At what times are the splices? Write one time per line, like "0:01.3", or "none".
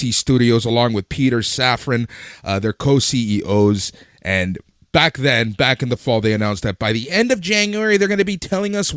none